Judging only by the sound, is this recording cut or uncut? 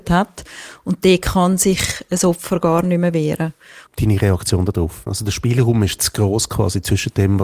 cut